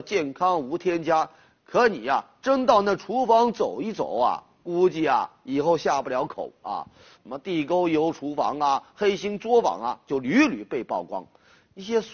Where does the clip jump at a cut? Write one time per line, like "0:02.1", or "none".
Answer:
0:07.1